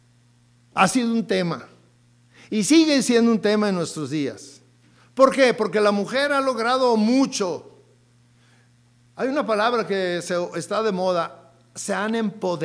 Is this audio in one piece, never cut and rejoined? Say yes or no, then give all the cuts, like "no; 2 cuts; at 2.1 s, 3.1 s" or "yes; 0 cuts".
yes; 0 cuts